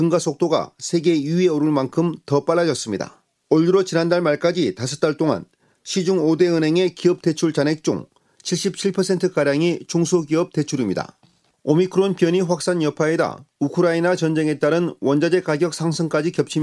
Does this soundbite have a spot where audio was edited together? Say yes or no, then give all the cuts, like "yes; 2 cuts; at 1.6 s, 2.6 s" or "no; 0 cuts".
no; 0 cuts